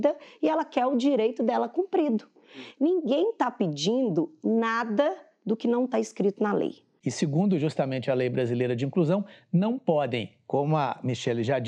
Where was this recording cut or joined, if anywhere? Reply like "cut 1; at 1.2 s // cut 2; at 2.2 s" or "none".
cut 1; at 7.0 s